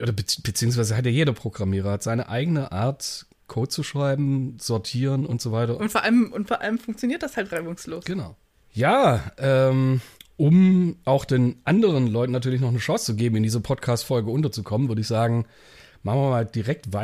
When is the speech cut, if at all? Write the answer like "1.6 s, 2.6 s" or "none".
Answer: 5.8 s